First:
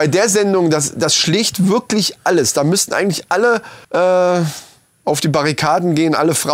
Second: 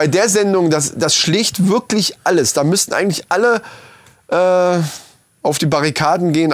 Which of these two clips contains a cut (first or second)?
first